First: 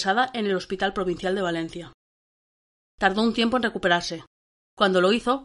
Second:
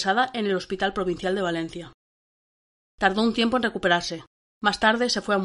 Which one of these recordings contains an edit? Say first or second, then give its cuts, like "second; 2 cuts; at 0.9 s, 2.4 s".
second; 1 cut; at 4.4 s